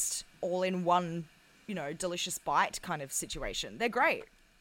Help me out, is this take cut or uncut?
uncut